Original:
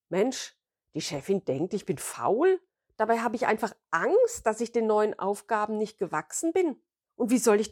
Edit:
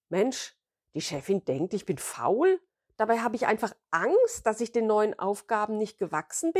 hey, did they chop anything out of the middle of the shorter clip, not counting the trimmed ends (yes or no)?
no